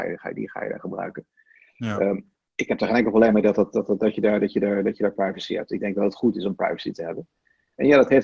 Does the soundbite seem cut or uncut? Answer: uncut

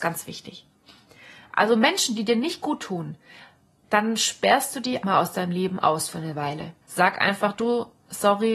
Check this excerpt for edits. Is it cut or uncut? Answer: cut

